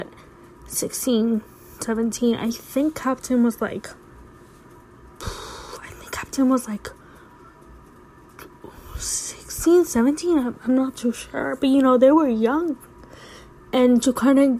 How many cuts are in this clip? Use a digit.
0